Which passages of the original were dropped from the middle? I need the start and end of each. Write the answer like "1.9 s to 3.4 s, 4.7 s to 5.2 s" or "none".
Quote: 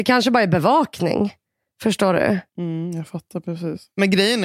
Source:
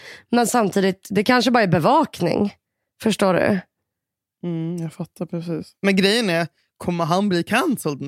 3.7 s to 4.3 s